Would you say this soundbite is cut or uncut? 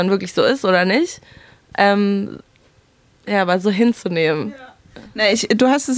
uncut